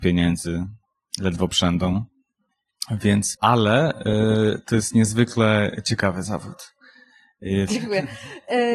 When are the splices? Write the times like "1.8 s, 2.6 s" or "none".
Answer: 3.3 s, 7.7 s